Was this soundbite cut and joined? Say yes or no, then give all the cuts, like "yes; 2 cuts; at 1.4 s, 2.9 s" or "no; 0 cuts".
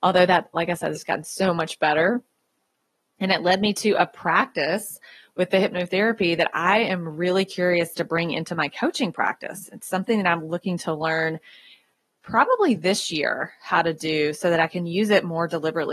yes; 1 cut; at 3.0 s